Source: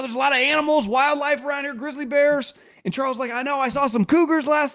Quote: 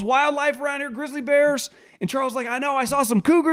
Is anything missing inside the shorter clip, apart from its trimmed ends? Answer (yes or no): no